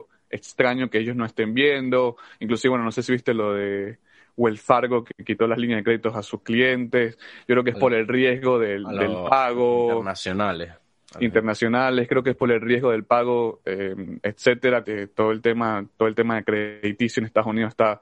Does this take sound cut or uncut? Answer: cut